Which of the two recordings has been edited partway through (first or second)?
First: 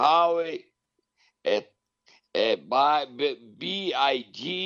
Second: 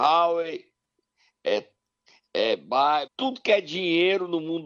second